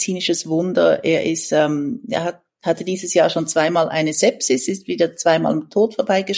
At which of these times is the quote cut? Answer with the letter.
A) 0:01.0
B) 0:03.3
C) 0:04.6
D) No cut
D